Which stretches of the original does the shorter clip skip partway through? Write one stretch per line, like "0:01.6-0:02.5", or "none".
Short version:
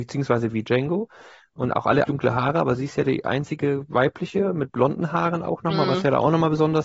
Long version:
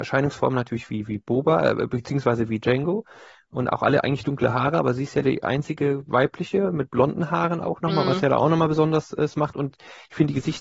0:04.0-0:04.2